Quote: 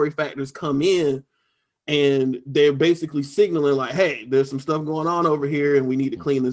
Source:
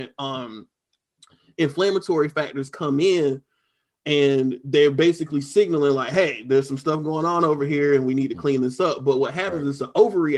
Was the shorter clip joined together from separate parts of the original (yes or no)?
no